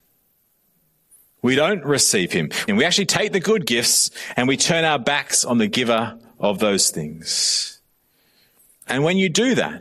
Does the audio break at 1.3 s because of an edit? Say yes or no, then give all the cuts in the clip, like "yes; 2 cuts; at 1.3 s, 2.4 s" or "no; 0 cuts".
no; 1 cut; at 2.7 s